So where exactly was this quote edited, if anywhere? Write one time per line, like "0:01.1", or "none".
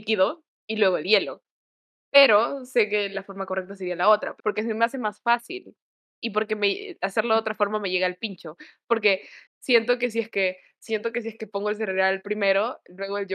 0:04.4